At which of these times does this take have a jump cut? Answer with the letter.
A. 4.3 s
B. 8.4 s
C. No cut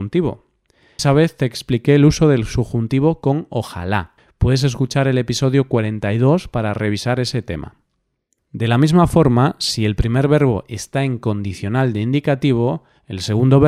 B